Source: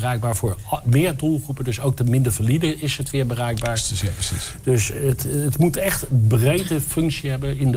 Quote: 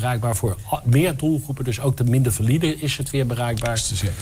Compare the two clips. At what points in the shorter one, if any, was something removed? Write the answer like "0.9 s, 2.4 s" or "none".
none